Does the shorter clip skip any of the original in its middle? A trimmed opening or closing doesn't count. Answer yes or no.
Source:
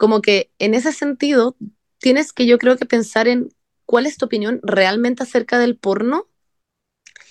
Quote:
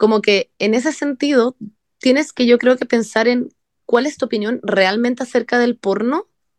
no